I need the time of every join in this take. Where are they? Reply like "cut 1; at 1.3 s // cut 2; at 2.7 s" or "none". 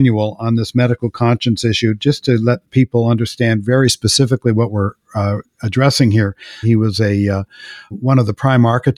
cut 1; at 6.6 s // cut 2; at 7.9 s